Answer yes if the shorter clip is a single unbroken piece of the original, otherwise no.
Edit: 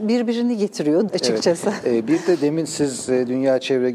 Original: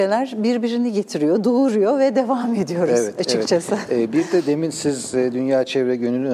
no